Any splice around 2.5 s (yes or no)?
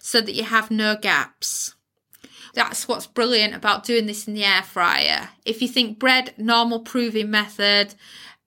yes